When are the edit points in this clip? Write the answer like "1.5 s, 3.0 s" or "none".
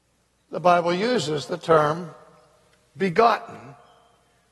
none